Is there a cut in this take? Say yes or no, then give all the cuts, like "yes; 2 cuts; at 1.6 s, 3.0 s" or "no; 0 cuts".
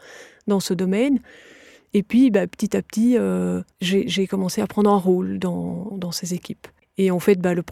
yes; 2 cuts; at 3.7 s, 5.9 s